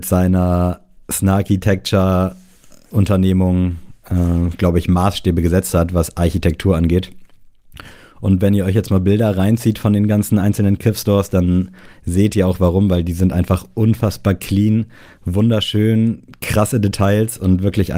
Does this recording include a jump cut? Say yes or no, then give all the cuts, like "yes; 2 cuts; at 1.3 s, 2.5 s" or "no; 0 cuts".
no; 0 cuts